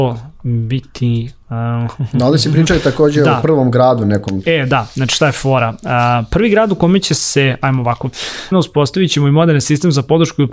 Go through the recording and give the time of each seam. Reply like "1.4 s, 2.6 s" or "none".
8.5 s